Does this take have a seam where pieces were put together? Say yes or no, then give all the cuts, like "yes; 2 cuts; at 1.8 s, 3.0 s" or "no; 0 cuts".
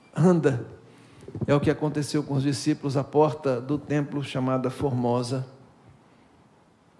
no; 0 cuts